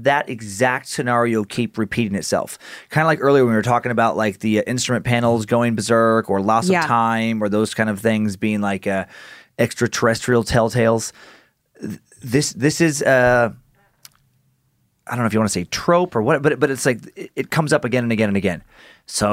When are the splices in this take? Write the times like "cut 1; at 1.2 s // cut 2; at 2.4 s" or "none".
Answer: none